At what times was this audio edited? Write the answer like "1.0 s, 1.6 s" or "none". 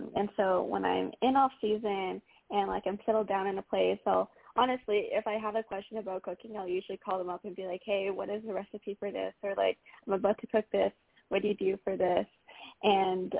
none